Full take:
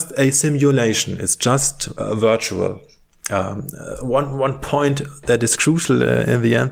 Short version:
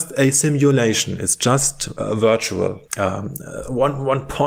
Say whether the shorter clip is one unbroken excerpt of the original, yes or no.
no